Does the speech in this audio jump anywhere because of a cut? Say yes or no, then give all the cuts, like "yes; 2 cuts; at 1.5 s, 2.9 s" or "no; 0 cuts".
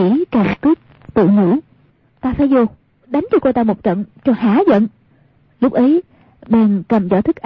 no; 0 cuts